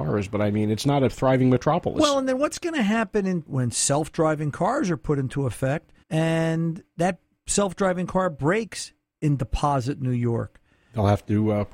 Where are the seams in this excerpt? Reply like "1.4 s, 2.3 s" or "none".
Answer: 3.5 s, 6.0 s